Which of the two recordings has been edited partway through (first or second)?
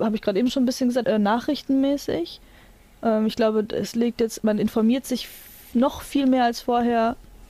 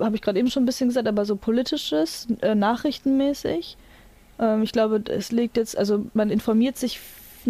first